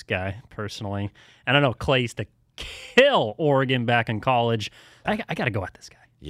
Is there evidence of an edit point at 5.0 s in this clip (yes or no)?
yes